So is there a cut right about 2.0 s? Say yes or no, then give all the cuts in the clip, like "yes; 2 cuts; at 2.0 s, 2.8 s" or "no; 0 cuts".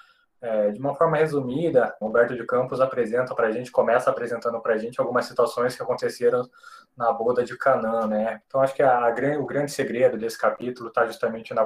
yes; 2 cuts; at 2.0 s, 8.4 s